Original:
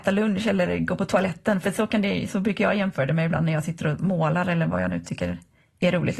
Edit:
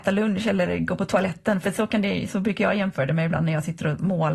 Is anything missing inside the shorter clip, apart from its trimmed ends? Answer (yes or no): no